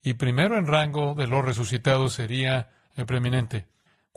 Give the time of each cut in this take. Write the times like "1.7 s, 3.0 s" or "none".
none